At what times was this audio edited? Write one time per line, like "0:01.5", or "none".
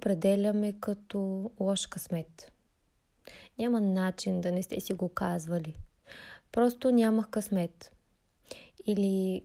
none